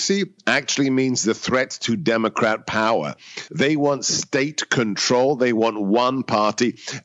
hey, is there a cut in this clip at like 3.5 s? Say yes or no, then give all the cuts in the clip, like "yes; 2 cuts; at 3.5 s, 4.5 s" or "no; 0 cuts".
yes; 1 cut; at 3.5 s